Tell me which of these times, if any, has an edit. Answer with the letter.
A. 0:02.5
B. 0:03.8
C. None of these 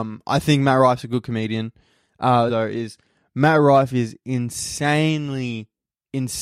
A